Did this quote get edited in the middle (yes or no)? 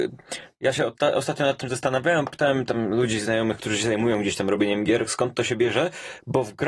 no